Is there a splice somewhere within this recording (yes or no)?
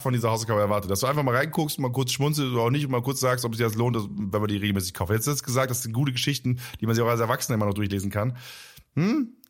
no